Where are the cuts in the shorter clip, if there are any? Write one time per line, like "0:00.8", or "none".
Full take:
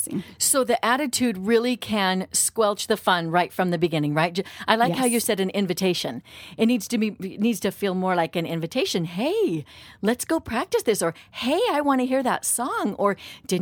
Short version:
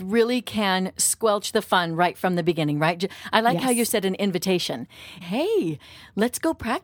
0:05.2